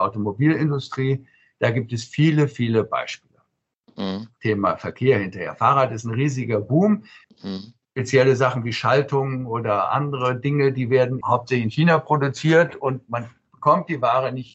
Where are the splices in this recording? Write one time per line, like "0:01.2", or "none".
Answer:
0:04.4
0:07.2
0:11.2